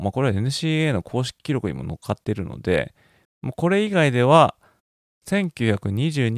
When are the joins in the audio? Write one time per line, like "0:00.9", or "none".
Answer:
0:03.2